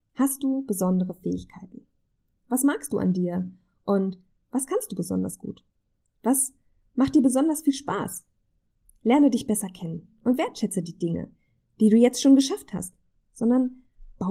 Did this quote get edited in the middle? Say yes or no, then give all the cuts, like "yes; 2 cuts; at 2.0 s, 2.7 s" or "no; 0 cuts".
yes; 1 cut; at 13.2 s